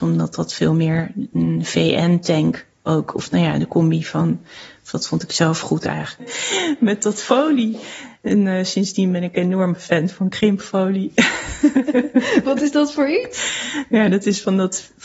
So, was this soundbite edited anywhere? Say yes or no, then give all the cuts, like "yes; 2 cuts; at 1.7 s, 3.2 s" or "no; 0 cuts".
yes; 1 cut; at 6.2 s